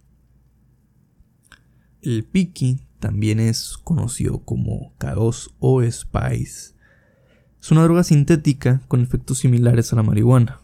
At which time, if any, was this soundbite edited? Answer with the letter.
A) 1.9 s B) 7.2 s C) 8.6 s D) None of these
D